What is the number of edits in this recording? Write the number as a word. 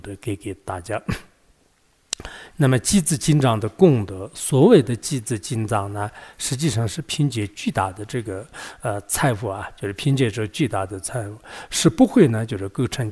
one